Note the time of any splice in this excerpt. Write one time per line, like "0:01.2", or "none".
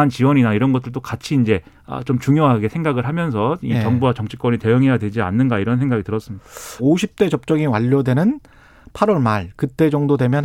0:06.8

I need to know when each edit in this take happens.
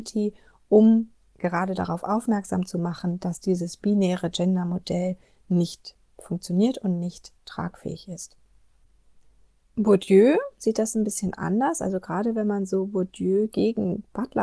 none

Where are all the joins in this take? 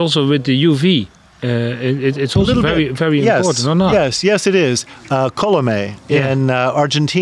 none

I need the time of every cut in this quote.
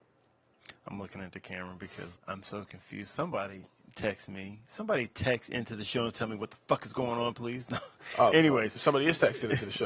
0:02.2

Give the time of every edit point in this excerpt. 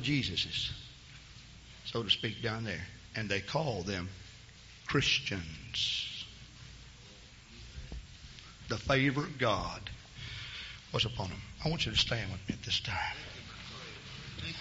none

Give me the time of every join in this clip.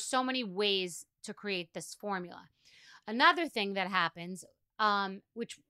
none

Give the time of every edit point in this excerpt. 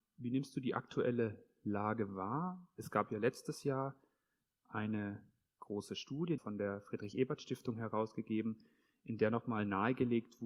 0:06.4

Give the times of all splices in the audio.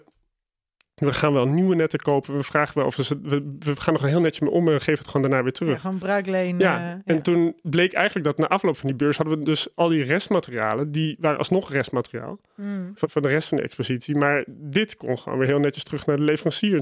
0:13.0

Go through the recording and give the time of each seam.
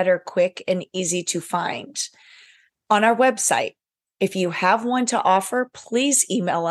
none

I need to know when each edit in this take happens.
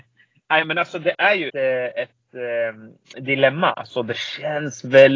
0:01.5
0:03.7

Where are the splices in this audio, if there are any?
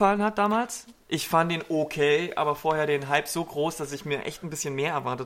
none

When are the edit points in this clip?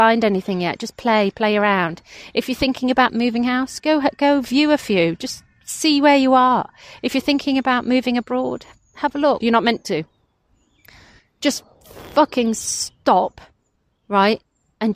0:09.4

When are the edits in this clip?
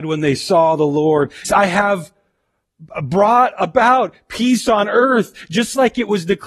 0:01.4

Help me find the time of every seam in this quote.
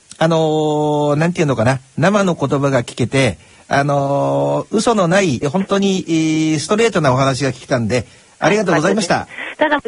0:05.4

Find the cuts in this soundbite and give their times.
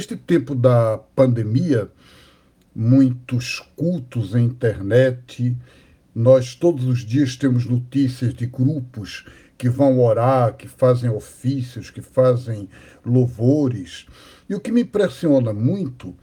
0:02.7

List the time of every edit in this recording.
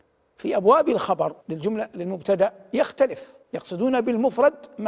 0:01.4
0:03.4

